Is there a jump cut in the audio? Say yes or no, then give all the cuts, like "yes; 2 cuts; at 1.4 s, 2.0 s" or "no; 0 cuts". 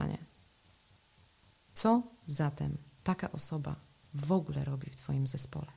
no; 0 cuts